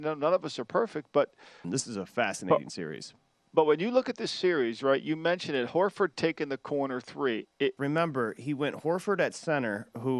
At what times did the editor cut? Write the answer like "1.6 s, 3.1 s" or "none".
1.6 s, 7.8 s